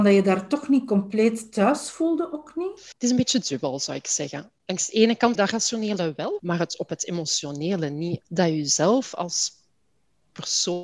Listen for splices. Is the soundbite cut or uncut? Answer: cut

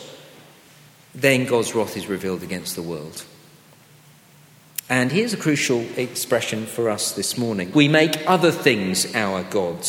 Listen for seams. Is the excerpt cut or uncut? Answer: cut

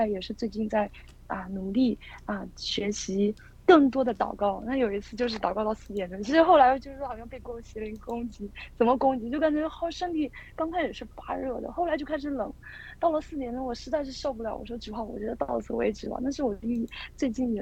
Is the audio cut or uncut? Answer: uncut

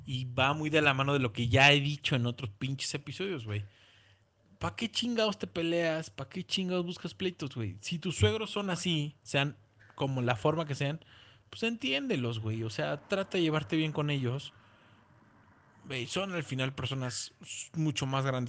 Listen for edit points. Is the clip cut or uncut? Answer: uncut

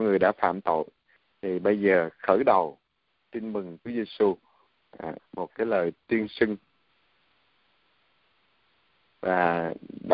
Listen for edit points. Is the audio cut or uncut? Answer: cut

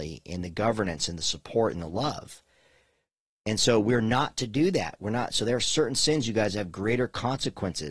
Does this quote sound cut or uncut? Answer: uncut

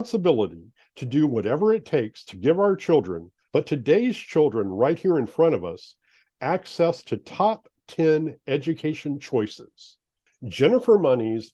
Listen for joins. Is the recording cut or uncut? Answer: cut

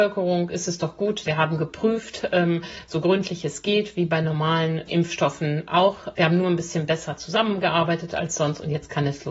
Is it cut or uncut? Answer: cut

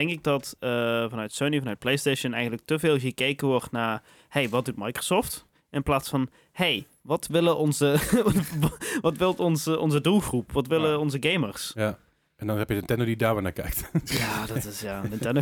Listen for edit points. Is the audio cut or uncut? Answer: uncut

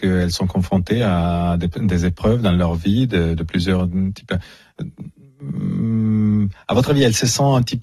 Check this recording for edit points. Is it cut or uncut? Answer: uncut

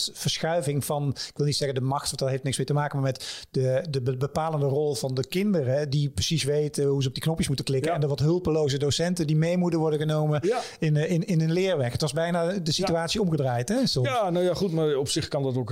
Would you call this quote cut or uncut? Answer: uncut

